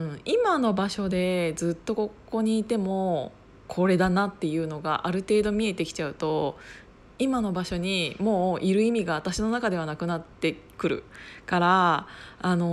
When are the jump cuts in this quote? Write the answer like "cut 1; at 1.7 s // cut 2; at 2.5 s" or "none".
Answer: none